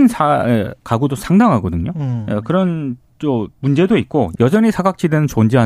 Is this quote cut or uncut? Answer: cut